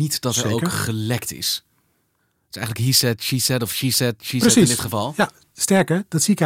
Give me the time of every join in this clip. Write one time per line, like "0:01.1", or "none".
none